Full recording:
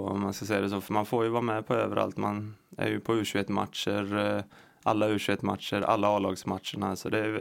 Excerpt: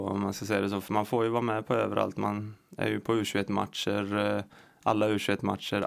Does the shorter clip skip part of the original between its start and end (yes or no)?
no